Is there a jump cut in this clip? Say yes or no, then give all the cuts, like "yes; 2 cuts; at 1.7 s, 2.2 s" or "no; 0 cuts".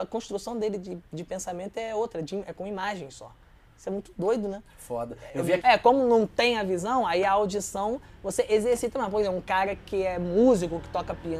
yes; 1 cut; at 5.6 s